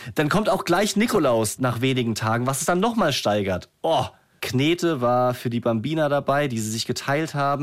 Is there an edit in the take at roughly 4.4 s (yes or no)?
yes